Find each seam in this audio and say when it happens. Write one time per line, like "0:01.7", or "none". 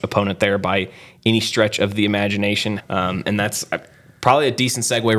0:02.8

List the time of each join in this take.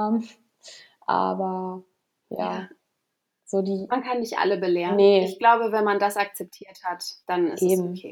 0:07.2

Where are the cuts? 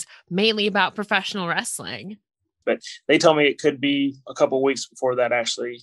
0:02.6

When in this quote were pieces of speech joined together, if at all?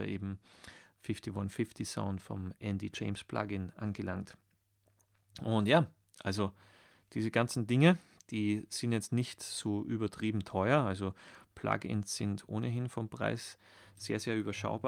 none

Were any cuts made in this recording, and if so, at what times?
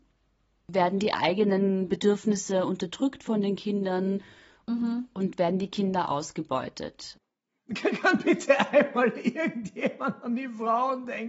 none

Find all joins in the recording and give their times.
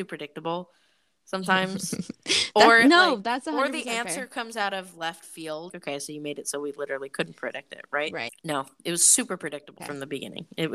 0:05.7
0:08.3
0:09.8

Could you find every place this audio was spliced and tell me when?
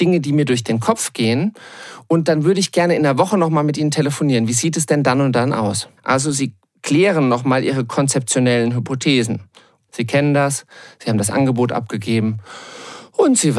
0:06.0
0:09.9

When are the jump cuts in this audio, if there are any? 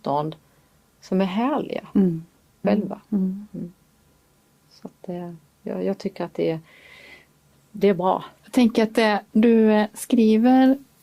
0:02.6
0:08.4

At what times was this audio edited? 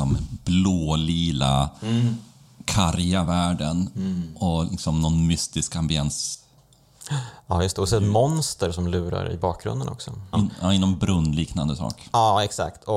0:10.3

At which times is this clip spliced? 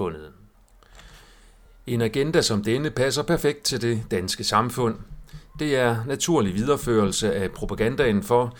none

